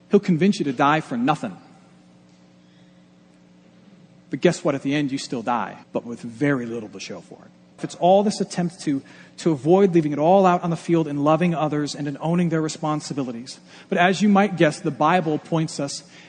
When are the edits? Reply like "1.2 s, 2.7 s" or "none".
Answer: 5.8 s, 7.8 s